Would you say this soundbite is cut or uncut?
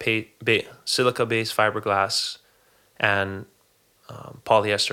uncut